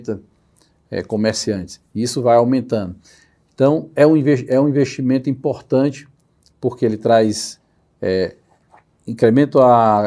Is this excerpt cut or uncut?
uncut